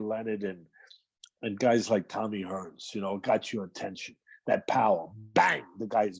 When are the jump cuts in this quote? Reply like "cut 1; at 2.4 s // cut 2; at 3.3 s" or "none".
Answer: none